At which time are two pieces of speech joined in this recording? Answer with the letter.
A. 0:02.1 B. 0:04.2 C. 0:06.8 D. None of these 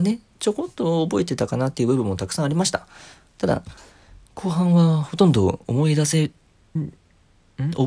C